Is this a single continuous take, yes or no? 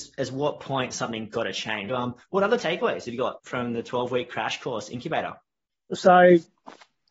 no